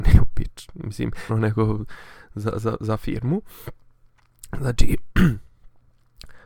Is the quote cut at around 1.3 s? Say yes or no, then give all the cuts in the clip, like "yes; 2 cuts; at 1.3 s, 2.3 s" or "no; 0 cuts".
yes; 1 cut; at 1.3 s